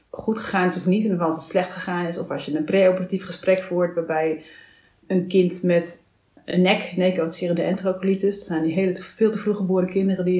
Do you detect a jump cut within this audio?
no; 0 cuts

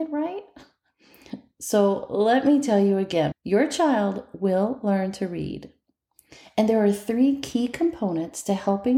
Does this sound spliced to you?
yes; 1 cut; at 3.3 s

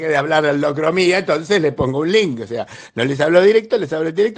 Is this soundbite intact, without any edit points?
yes; 0 cuts

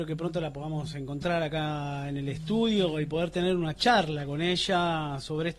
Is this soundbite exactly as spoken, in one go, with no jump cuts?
yes; 0 cuts

